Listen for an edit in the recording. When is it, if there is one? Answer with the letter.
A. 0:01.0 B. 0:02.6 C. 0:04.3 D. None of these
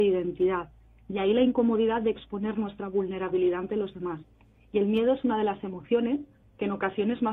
D